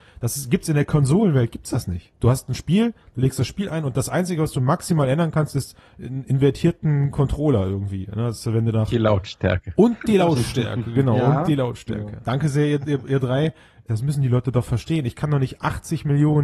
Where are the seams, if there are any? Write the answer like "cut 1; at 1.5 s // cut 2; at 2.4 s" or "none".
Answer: cut 1; at 12.2 s // cut 2; at 13.9 s

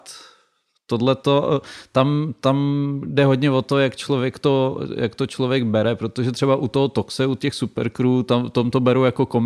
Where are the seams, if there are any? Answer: none

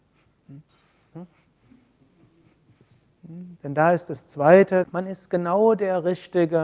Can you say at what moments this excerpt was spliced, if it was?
cut 1; at 1.1 s // cut 2; at 3.6 s // cut 3; at 4.8 s

